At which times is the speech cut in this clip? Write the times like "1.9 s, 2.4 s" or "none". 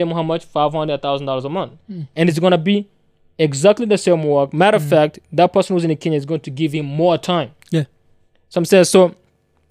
none